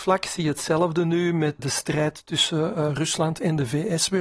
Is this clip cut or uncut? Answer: cut